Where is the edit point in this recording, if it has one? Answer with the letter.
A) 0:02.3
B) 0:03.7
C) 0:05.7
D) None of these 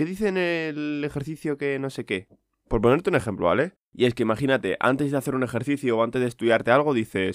B